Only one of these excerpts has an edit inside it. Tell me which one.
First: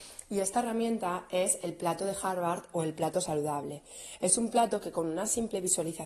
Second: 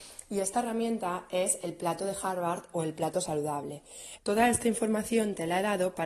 second; 1 cut; at 4.2 s

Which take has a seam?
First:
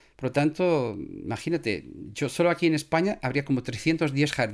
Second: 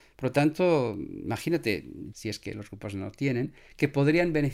second; 1 cut; at 2.1 s

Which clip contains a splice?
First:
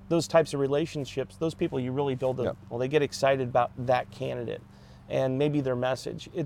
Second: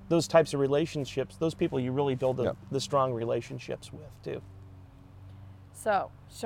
first; 1 cut; at 2.7 s

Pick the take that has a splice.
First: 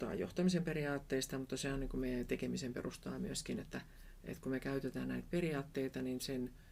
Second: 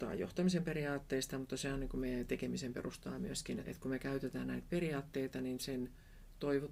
second; 1 cut; at 3.6 s

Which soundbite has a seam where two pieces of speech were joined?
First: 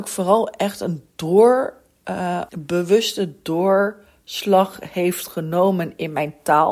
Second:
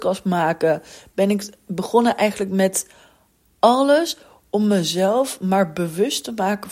first; 1 cut; at 2.5 s

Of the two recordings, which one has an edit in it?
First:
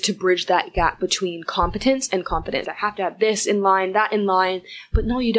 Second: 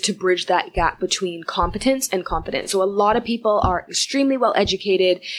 first; 1 cut; at 2.6 s

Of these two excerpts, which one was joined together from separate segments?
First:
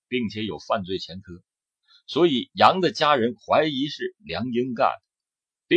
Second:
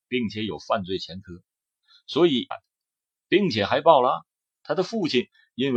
second; 2 cuts; at 2.5 s, 4.6 s

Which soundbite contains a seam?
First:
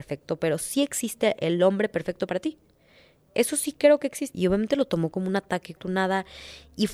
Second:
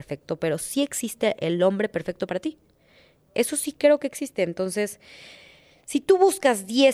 first; 2 cuts; at 4.3 s, 5.8 s

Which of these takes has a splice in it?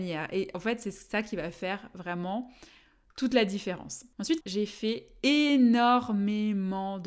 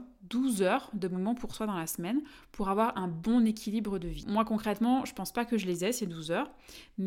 first; 1 cut; at 4.4 s

